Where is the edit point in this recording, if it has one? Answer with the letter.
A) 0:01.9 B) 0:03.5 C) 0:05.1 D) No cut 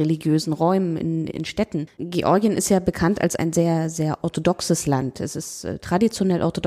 A